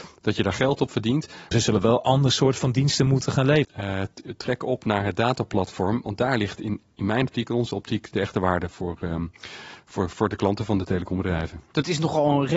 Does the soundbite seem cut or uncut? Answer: cut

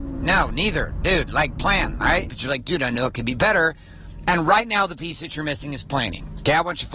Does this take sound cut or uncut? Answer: cut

